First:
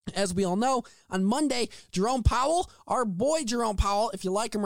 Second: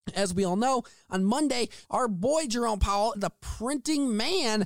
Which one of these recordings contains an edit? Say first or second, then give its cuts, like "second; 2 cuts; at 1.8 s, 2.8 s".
second; 2 cuts; at 1.8 s, 3.1 s